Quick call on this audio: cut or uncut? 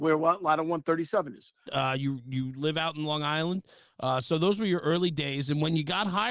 cut